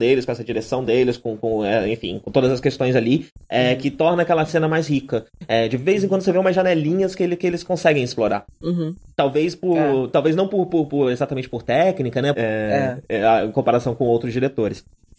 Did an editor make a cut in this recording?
yes; 2 cuts; at 8.5 s, 12.3 s

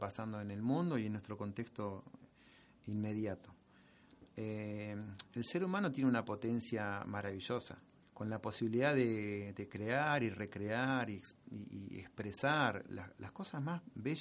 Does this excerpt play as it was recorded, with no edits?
no; 1 cut; at 8.0 s

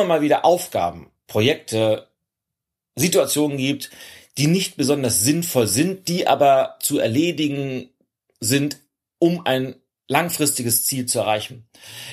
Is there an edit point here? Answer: no; 0 cuts

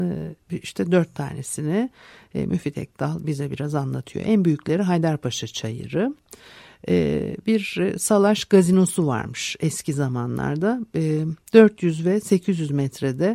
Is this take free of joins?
yes; 0 cuts

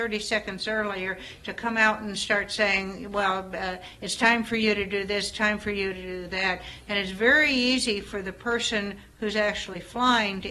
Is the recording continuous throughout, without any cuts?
yes; 0 cuts

